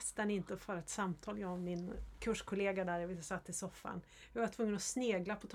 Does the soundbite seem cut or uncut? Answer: uncut